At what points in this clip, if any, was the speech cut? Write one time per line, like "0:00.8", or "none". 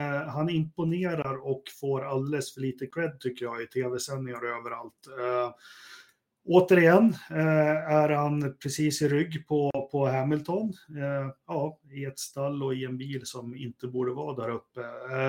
none